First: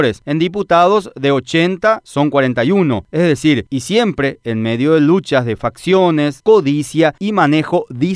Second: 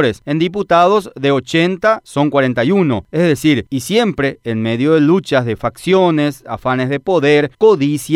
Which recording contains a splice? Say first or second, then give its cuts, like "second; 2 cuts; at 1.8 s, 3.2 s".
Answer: first; 1 cut; at 6.4 s